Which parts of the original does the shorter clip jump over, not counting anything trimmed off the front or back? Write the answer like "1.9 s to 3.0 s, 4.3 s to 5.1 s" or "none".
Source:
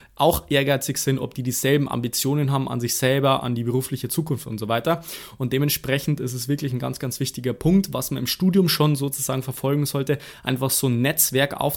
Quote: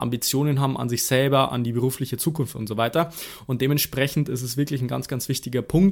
none